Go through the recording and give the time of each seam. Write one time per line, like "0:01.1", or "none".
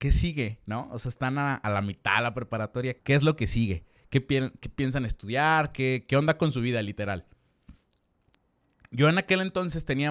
0:03.0